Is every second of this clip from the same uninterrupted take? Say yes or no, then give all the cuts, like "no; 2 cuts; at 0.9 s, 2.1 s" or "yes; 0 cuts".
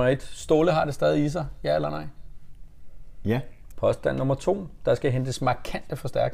no; 1 cut; at 3.7 s